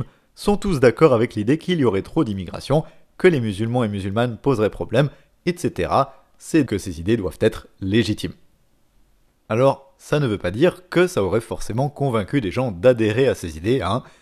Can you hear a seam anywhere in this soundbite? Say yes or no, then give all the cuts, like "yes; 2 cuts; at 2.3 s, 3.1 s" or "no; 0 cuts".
yes; 1 cut; at 6.7 s